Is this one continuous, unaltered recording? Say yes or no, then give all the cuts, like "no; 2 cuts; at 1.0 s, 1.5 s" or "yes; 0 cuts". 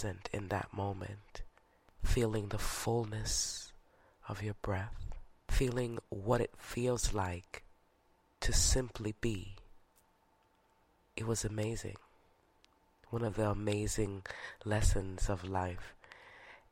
yes; 0 cuts